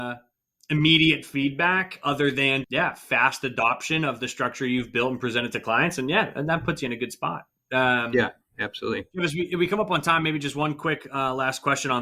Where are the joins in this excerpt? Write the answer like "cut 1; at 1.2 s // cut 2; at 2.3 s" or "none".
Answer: cut 1; at 2.6 s